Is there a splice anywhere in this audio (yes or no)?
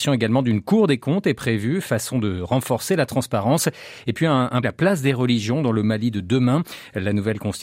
yes